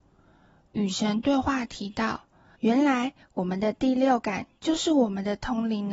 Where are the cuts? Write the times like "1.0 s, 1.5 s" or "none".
2.5 s

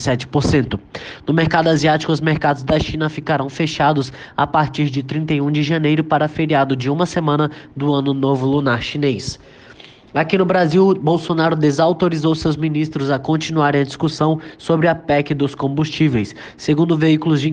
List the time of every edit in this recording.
none

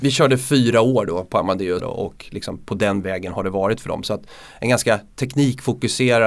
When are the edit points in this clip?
1.8 s

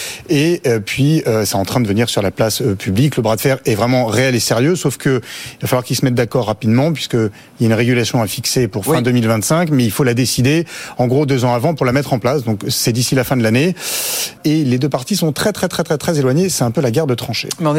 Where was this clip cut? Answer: 14.4 s

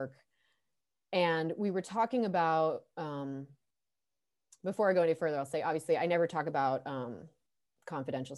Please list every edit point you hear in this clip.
none

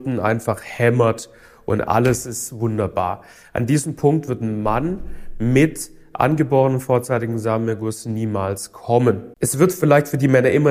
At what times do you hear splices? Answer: 9.3 s

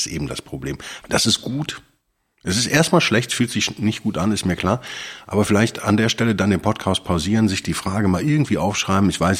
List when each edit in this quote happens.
1.0 s

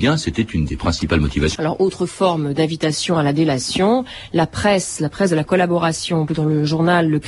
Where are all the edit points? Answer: 1.6 s, 6.3 s

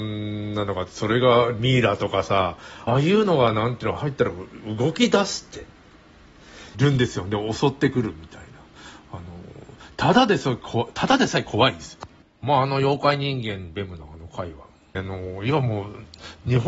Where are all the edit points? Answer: 2.9 s, 6.7 s, 15.0 s

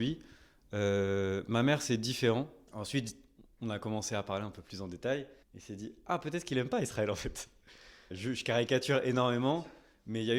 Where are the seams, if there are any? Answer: 2.7 s, 5.4 s, 8.1 s

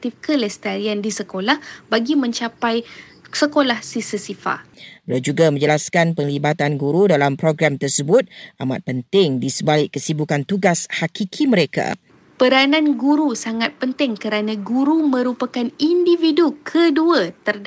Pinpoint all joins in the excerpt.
none

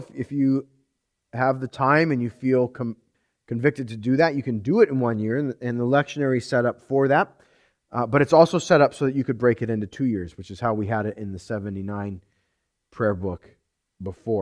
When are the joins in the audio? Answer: none

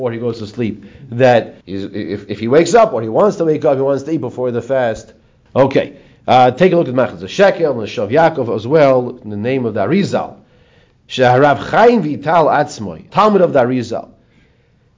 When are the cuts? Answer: 1.6 s, 5.5 s, 13.1 s

